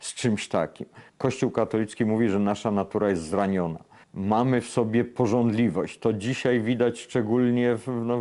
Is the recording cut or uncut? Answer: cut